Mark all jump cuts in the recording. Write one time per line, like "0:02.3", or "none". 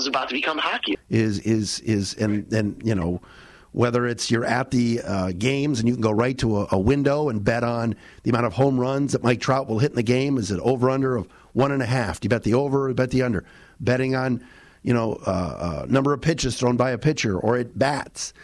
0:00.9